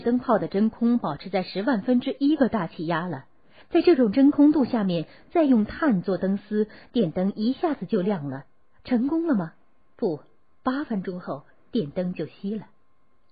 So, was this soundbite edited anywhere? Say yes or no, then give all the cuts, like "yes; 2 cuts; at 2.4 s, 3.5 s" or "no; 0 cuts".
yes; 1 cut; at 3.6 s